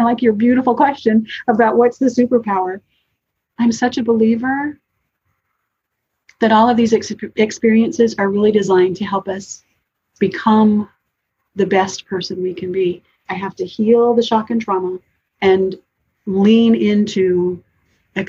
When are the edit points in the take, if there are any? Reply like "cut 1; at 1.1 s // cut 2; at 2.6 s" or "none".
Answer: cut 1; at 13.3 s // cut 2; at 15.3 s